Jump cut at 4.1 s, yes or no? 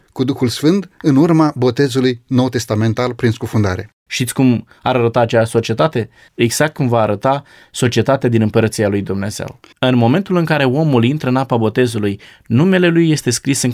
yes